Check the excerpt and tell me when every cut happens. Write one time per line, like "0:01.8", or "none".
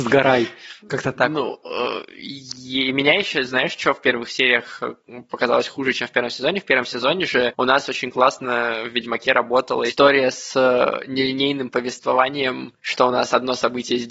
0:12.8